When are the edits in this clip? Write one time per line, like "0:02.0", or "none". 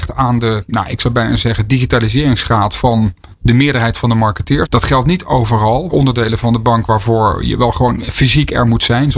0:04.6
0:05.9